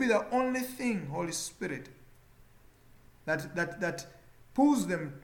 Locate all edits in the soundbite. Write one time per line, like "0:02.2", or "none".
none